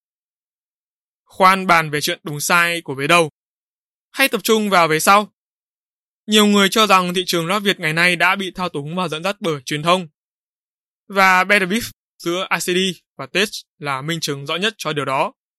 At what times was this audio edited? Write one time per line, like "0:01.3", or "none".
0:10.9